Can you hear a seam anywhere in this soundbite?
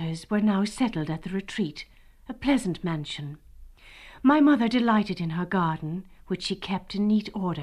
no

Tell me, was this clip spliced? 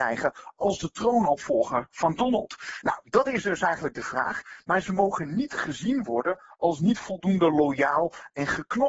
no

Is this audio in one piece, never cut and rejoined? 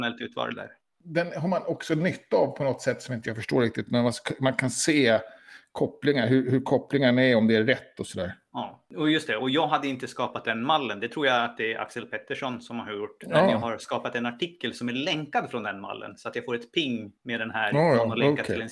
yes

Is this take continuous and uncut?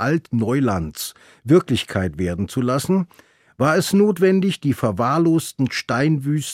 yes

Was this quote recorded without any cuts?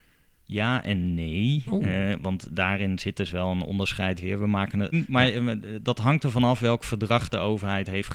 no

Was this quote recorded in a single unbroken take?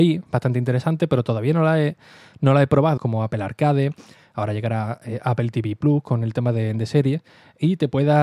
no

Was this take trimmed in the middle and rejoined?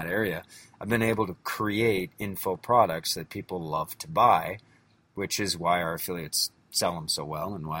no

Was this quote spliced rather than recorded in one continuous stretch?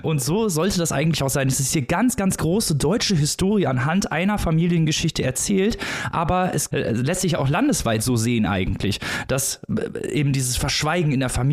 no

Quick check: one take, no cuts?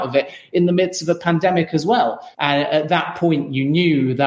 no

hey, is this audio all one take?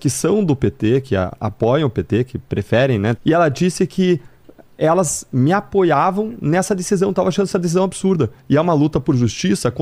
no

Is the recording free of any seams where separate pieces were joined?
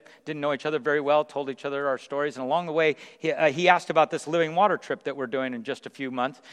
yes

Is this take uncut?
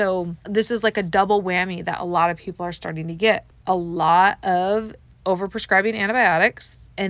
yes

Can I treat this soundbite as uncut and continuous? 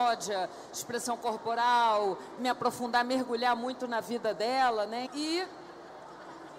no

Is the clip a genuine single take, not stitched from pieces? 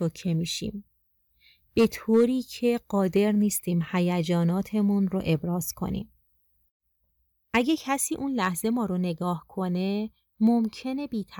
yes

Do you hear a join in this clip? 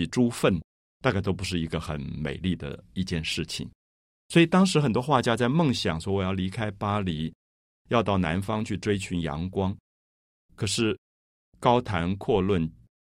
no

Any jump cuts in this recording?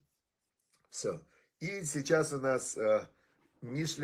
no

